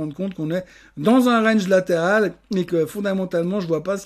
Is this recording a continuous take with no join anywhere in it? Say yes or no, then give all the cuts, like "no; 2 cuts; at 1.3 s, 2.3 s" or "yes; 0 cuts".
yes; 0 cuts